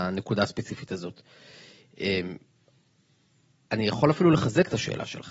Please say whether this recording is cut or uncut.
uncut